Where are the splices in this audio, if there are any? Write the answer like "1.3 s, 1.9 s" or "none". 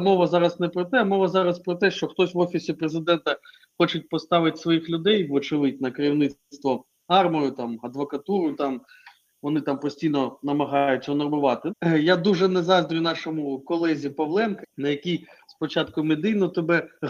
11.7 s, 14.6 s